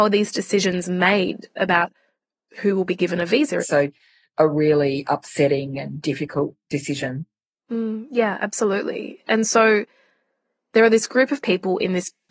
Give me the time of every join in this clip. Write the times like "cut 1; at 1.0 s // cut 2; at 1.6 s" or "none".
cut 1; at 3.6 s